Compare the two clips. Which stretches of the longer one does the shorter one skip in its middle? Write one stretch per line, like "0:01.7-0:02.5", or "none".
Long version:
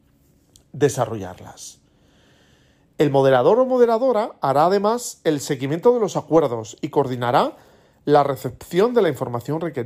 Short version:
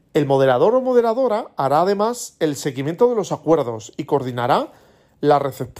none

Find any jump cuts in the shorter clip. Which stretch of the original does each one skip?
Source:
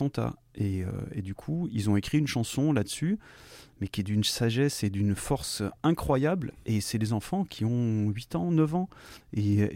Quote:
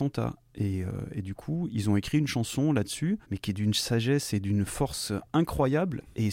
0:03.2-0:03.7

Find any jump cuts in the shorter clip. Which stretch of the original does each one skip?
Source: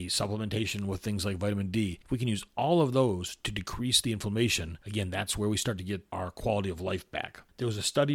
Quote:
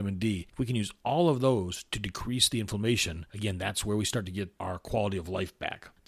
none

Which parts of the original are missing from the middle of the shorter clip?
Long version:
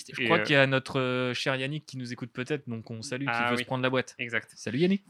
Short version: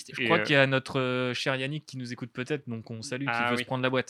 none

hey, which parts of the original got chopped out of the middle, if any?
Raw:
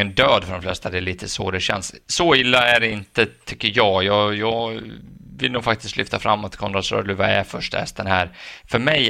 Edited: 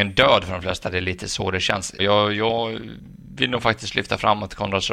0:02.0-0:04.0

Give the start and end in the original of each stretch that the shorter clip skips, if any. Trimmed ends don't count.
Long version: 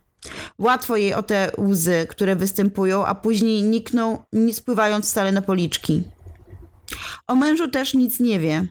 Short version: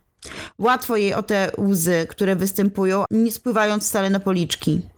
0:03.1-0:04.3

